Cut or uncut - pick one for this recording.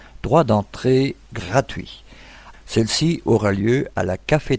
cut